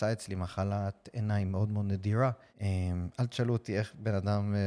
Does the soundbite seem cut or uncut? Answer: cut